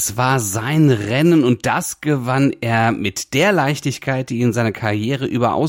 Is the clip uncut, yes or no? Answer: yes